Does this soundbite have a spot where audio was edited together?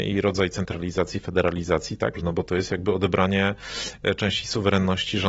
yes; 1 cut; at 2.1 s

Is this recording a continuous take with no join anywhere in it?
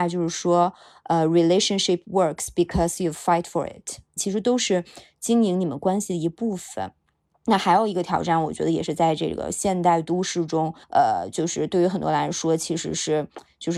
no; 2 cuts; at 4.2 s, 10.8 s

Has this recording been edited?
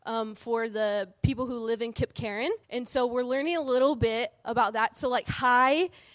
yes; 1 cut; at 2.6 s

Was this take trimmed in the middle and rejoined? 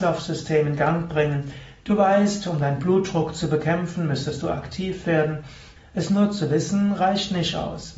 yes; 1 cut; at 5.8 s

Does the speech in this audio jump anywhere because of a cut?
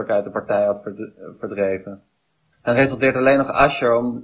yes; 1 cut; at 2.5 s

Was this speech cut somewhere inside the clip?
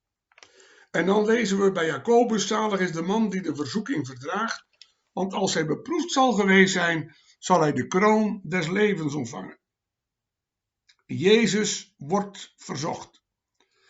no; 0 cuts

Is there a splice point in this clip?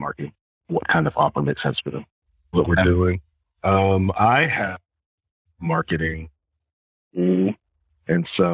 yes; 1 cut; at 2.5 s

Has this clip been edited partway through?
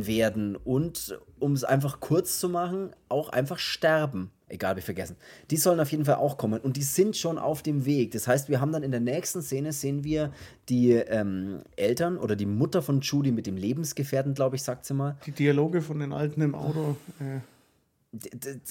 yes; 2 cuts; at 4.5 s, 15.2 s

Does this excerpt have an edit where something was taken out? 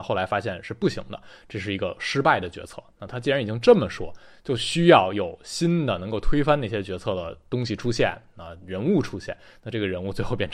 no; 0 cuts

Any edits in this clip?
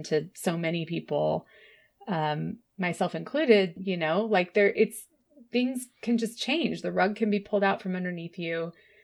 yes; 1 cut; at 3.8 s

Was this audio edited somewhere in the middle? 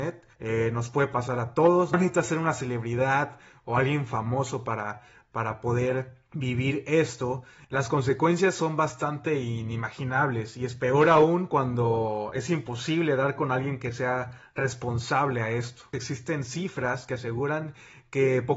no; 0 cuts

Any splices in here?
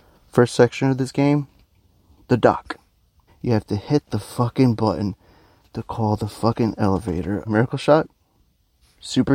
yes; 2 cuts; at 3.3 s, 7.4 s

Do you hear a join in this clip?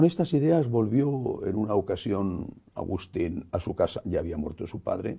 no; 0 cuts

